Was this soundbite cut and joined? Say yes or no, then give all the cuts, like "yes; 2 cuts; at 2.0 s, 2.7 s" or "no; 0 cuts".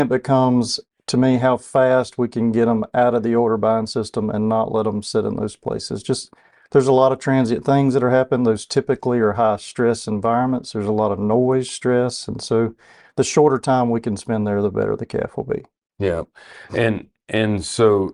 no; 0 cuts